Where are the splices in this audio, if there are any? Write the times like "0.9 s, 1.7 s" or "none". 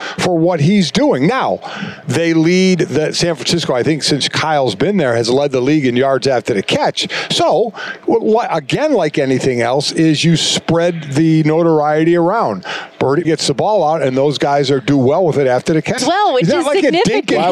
13.2 s, 16.0 s